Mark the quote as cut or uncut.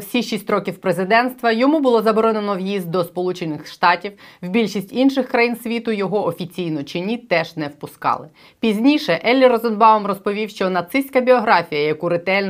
uncut